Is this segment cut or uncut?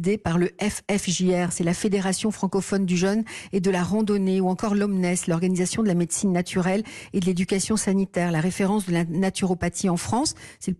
uncut